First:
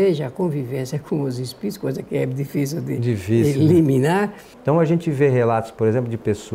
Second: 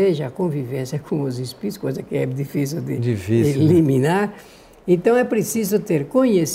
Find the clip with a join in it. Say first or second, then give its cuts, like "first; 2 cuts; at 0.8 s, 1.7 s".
first; 1 cut; at 4.5 s